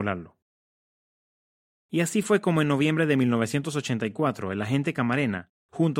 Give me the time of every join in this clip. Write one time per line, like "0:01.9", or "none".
none